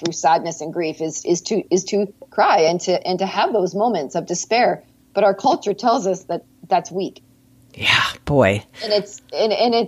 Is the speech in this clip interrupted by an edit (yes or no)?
no